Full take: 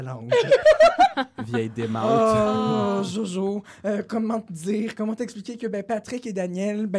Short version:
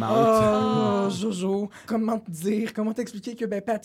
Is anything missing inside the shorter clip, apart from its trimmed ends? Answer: yes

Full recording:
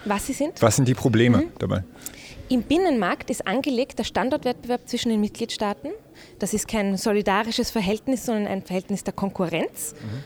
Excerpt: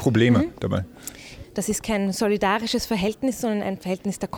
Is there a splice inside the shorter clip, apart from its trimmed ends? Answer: yes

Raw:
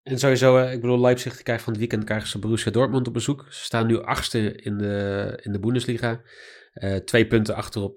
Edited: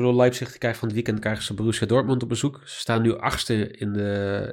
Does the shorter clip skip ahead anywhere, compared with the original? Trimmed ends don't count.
no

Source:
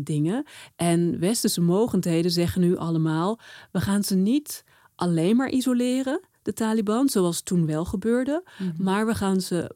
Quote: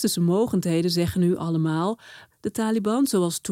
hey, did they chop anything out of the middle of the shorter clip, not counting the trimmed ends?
yes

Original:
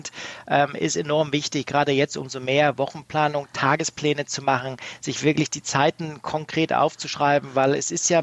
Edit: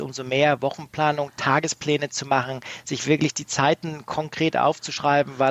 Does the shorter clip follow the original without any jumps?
yes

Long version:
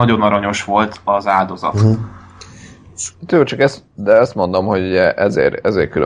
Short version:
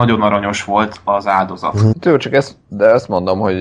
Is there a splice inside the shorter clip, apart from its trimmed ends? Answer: yes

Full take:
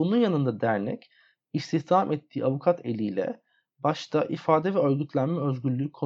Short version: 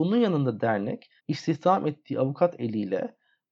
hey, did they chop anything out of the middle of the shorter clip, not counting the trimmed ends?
yes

